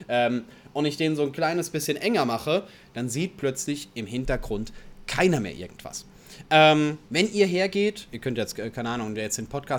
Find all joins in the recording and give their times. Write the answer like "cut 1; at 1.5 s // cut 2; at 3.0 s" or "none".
cut 1; at 7.0 s // cut 2; at 8.1 s